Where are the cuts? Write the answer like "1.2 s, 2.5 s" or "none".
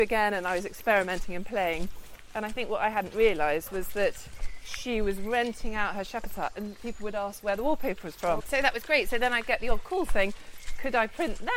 8.4 s

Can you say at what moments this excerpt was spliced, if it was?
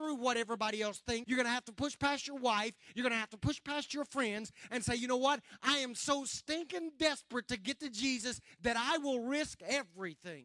1.2 s

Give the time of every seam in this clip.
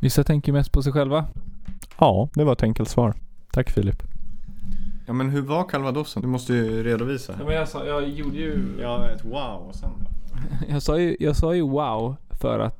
none

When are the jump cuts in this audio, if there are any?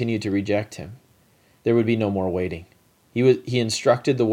1.6 s

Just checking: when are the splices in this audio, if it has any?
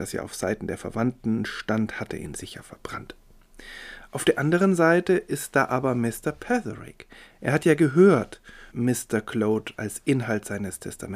8.7 s, 9.8 s

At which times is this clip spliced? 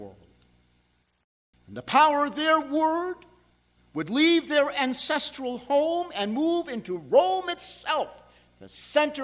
1.5 s

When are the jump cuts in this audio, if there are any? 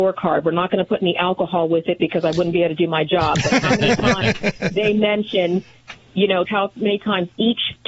6.4 s

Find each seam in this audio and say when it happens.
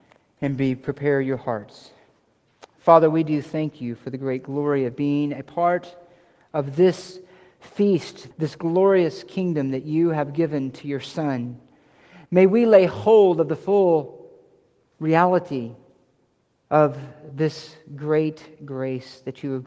8.3 s

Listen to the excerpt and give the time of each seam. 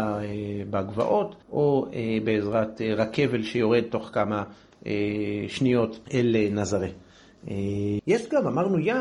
1.4 s, 6.0 s, 8.0 s

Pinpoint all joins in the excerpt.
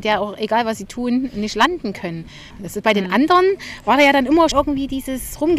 2.5 s, 4.5 s

